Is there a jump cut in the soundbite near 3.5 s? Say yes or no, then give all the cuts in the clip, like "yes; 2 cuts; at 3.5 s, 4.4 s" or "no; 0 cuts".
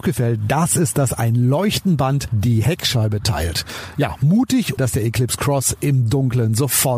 no; 1 cut; at 4.8 s